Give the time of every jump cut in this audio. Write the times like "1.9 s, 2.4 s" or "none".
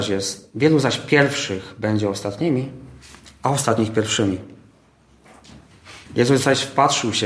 6.1 s